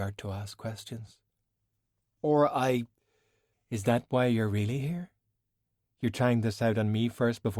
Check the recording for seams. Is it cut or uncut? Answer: cut